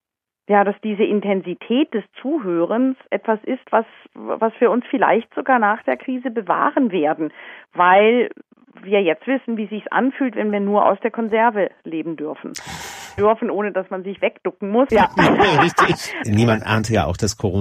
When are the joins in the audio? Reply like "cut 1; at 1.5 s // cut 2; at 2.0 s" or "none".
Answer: cut 1; at 13.2 s // cut 2; at 14.9 s // cut 3; at 16.2 s